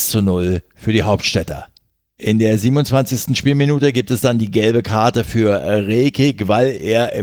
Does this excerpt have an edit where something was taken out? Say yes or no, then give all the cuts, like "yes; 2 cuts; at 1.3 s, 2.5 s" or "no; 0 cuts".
no; 0 cuts